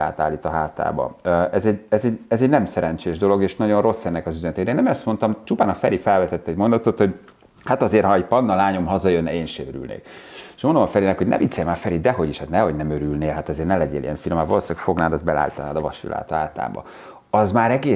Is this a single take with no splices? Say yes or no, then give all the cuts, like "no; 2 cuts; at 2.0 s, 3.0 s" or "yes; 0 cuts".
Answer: yes; 0 cuts